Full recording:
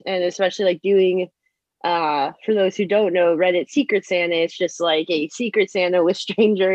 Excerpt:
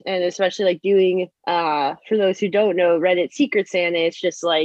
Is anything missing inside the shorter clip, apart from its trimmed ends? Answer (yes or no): yes